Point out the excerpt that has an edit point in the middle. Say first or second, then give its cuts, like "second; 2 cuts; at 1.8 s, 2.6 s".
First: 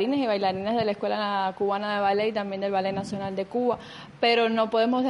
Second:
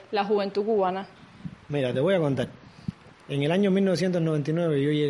second; 1 cut; at 3.2 s